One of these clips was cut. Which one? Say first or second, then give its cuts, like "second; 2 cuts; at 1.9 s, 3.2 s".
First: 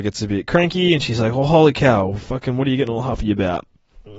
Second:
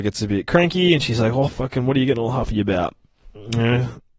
second; 1 cut; at 1.5 s